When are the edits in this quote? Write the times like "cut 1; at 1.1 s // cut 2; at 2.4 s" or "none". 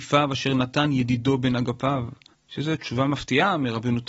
cut 1; at 2.3 s

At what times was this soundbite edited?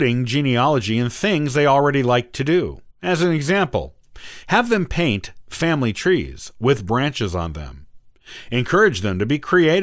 cut 1; at 2.9 s // cut 2; at 4.4 s

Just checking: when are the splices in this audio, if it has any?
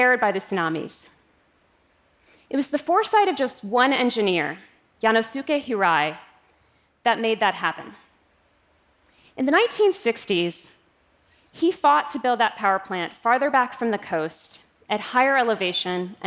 none

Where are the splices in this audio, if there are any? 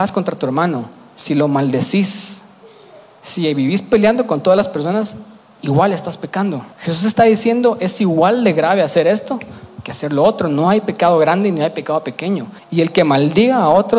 cut 1; at 6.7 s // cut 2; at 12.6 s

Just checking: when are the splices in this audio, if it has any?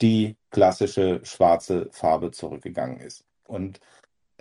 cut 1; at 3.5 s

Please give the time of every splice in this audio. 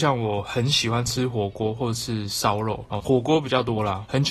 cut 1; at 3.0 s

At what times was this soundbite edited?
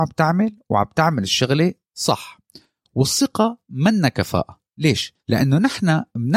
cut 1; at 5.2 s

